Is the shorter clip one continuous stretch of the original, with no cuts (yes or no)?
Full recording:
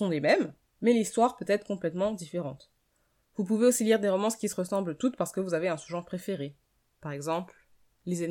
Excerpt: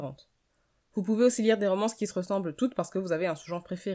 yes